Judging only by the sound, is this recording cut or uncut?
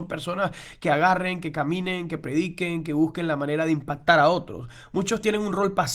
uncut